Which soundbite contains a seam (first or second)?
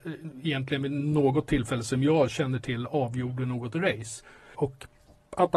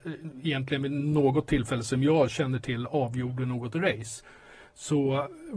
first